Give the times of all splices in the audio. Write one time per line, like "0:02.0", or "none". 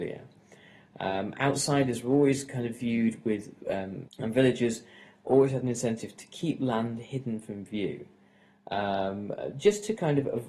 0:04.1